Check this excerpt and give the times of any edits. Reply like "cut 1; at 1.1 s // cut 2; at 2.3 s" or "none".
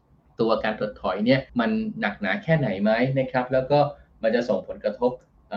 cut 1; at 1.5 s